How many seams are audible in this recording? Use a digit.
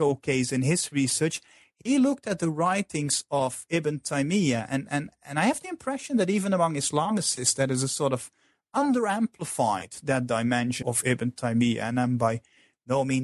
1